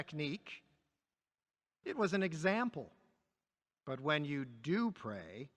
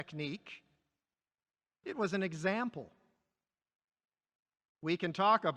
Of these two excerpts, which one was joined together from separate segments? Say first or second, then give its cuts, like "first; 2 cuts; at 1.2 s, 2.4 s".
first; 1 cut; at 3.7 s